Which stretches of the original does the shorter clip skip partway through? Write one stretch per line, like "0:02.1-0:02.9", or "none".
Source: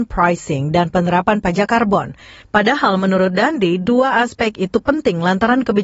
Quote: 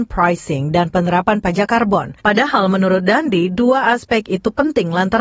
0:02.2-0:02.5